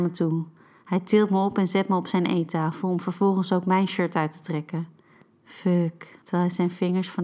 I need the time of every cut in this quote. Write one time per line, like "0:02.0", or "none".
0:06.2